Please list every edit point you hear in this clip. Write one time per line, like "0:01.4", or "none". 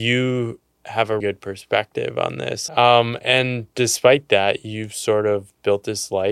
0:01.2
0:02.7